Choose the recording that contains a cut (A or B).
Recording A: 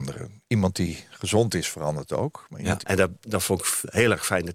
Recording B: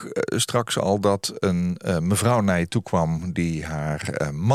A